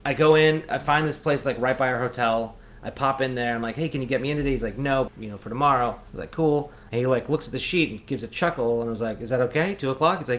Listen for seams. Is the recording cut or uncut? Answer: cut